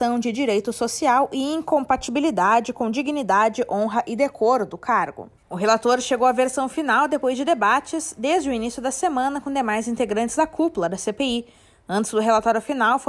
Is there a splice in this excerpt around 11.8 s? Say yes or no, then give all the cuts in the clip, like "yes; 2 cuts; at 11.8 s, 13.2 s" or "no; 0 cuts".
no; 1 cut; at 5.4 s